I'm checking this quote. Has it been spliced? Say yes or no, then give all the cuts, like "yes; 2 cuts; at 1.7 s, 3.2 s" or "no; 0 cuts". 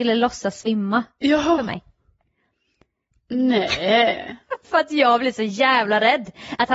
yes; 1 cut; at 3.1 s